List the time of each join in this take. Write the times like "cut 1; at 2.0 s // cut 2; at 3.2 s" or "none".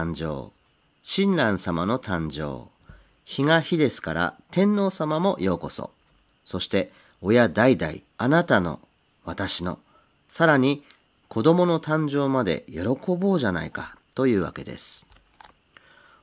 cut 1; at 8.1 s